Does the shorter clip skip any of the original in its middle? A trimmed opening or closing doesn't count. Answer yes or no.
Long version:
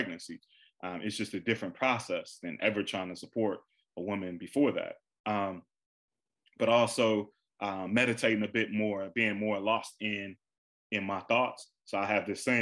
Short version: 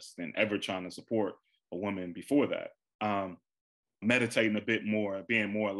yes